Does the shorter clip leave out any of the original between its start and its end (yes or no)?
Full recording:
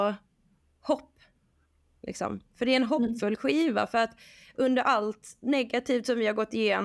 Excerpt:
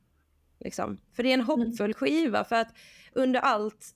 no